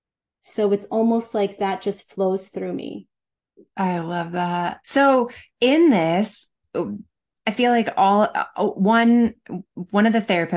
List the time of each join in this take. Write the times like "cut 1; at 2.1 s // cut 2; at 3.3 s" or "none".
cut 1; at 4.8 s

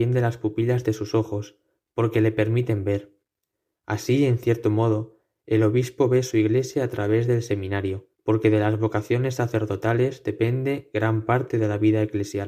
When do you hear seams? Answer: cut 1; at 8.1 s

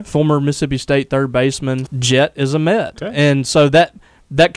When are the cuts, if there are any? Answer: cut 1; at 1.9 s

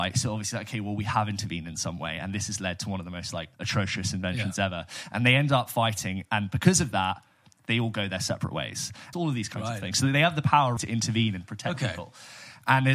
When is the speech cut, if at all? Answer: cut 1; at 3.5 s // cut 2; at 9.1 s // cut 3; at 10.8 s

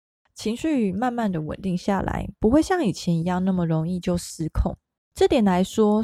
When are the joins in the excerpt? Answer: cut 1; at 5.1 s

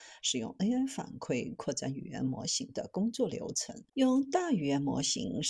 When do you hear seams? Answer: cut 1; at 3.9 s

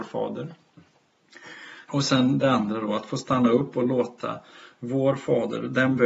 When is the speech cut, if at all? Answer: cut 1; at 1.9 s

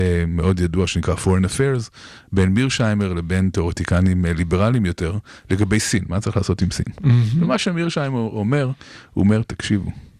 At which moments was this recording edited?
none

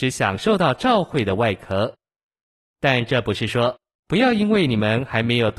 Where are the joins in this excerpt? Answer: cut 1; at 3.9 s

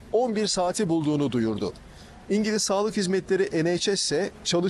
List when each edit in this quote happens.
cut 1; at 2.3 s

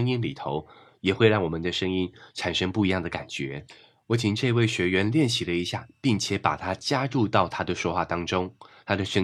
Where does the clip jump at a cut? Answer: none

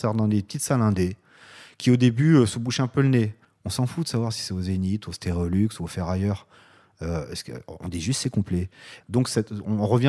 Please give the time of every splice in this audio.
cut 1; at 3.4 s // cut 2; at 9.0 s

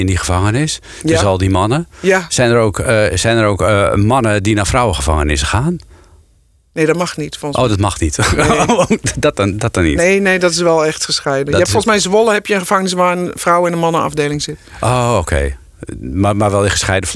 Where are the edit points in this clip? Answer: none

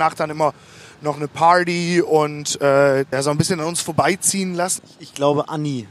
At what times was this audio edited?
cut 1; at 3.1 s // cut 2; at 4.8 s

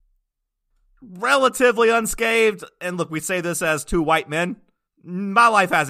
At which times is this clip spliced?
cut 1; at 4.9 s

